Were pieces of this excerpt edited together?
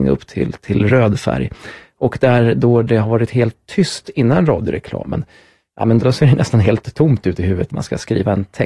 yes; 2 cuts; at 6.0 s, 7.7 s

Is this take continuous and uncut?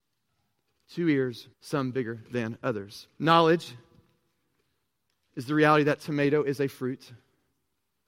no; 2 cuts; at 1.5 s, 3.1 s

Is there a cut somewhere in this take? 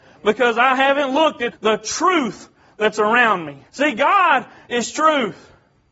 yes; 2 cuts; at 1.5 s, 3.7 s

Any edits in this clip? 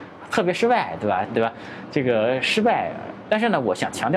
yes; 2 cuts; at 1.3 s, 3.3 s

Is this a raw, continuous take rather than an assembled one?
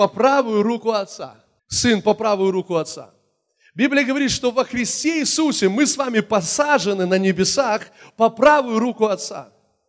no; 1 cut; at 1.6 s

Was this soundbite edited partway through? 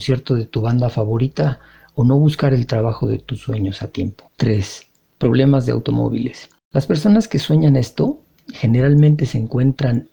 yes; 2 cuts; at 4.3 s, 6.6 s

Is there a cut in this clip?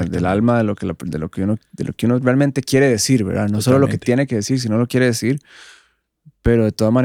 no; 0 cuts

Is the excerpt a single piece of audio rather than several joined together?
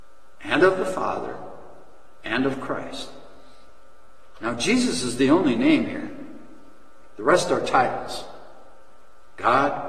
yes; 0 cuts

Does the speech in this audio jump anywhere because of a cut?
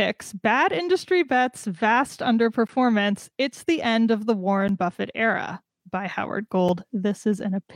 no; 0 cuts

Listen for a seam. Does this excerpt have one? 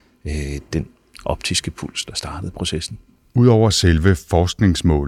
no; 0 cuts

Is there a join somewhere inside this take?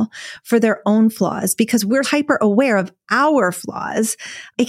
yes; 1 cut; at 2.0 s

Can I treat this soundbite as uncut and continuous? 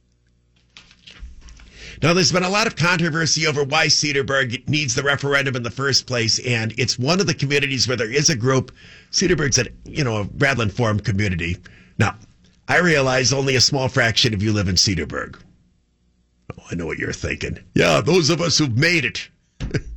no; 3 cuts; at 10.6 s, 11.9 s, 17.7 s

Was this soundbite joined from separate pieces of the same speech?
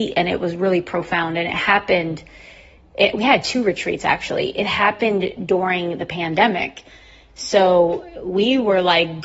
no; 0 cuts

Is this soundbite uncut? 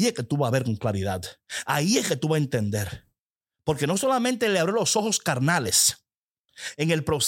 yes; 0 cuts

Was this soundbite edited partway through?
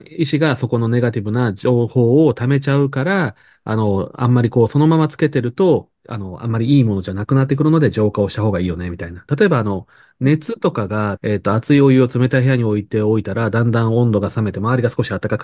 yes; 2 cuts; at 9.3 s, 11.2 s

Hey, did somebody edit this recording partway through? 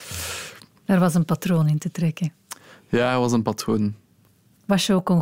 no; 0 cuts

